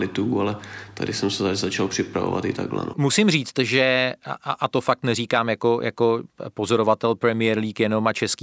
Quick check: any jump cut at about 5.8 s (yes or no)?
no